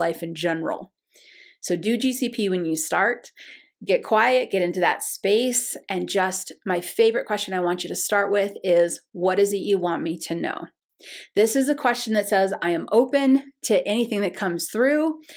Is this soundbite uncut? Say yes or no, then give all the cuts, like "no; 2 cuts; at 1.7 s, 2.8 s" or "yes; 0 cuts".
yes; 0 cuts